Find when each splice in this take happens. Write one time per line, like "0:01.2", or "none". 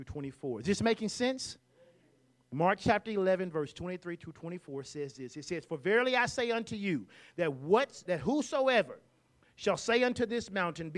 0:08.1